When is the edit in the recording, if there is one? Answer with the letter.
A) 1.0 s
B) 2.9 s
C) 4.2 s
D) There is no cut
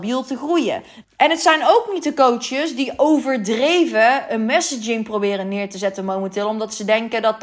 A